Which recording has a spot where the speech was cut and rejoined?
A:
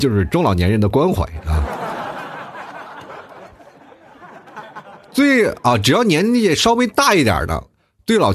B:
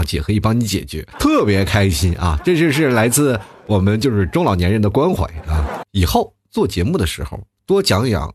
B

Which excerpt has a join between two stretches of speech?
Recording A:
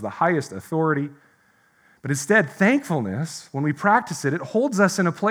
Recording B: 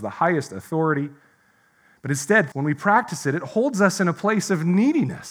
B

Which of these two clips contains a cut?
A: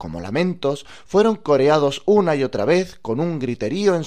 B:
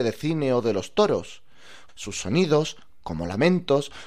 B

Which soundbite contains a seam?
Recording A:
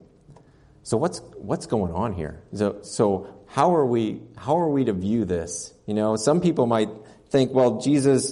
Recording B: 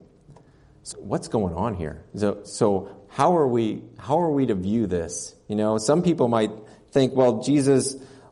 B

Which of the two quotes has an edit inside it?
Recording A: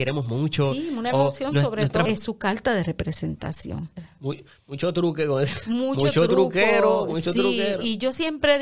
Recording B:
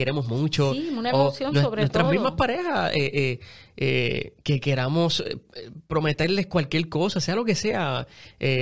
A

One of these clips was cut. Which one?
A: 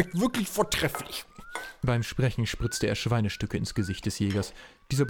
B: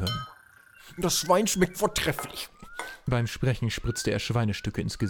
B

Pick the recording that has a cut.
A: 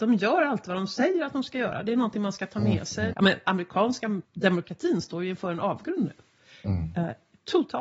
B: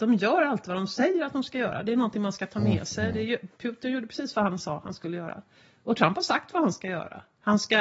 A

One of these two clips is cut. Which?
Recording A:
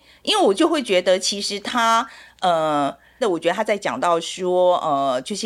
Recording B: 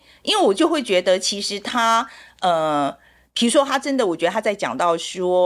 A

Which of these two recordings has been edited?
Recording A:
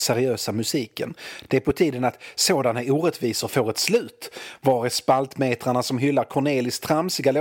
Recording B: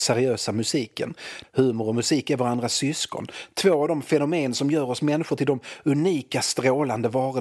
B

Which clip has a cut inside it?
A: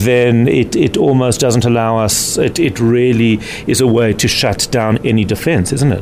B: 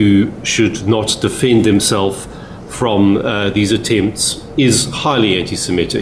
A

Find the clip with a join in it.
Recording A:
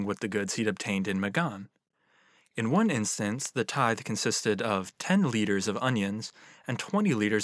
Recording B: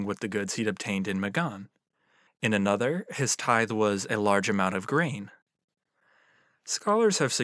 B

